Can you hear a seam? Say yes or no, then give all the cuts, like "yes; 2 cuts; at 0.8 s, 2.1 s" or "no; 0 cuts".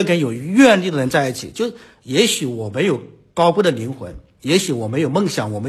no; 0 cuts